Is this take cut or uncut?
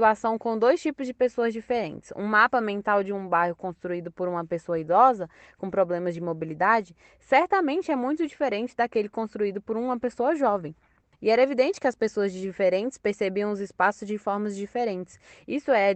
cut